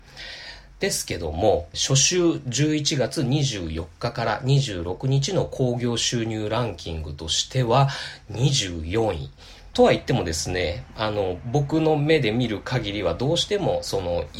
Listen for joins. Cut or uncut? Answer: cut